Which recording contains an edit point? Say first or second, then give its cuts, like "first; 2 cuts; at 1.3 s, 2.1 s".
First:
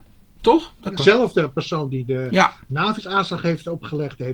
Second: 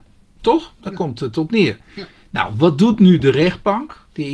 first; 1 cut; at 1.0 s